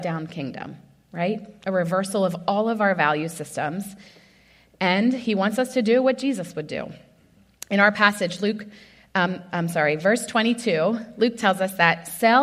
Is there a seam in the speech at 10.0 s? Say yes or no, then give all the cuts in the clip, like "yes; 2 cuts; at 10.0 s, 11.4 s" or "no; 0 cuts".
no; 0 cuts